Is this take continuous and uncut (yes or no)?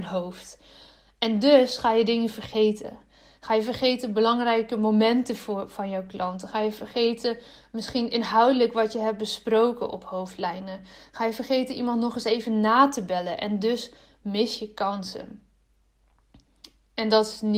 yes